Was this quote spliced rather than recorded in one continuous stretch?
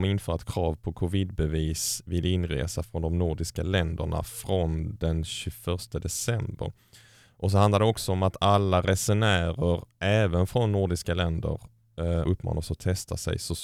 yes; 1 cut; at 12.2 s

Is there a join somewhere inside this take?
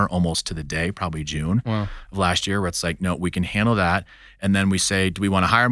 no; 0 cuts

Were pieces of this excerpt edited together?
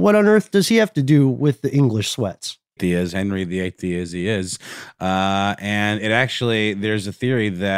yes; 1 cut; at 2.8 s

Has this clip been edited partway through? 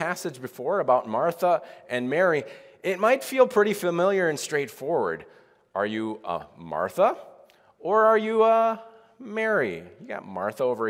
no; 0 cuts

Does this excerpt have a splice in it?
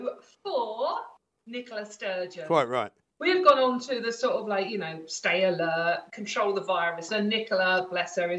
yes; 1 cut; at 7.1 s

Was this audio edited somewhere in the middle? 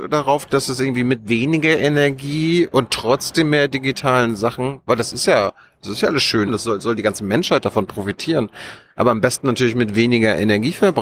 yes; 1 cut; at 6.5 s

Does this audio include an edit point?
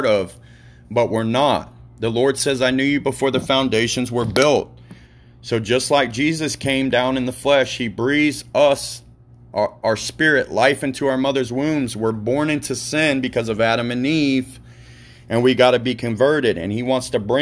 no; 0 cuts

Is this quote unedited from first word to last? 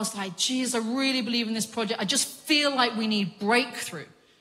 yes; 0 cuts

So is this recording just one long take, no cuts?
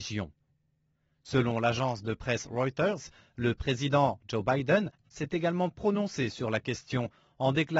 yes; 0 cuts

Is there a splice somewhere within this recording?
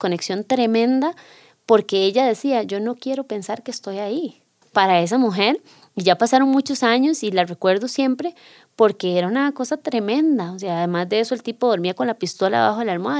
yes; 1 cut; at 4.6 s

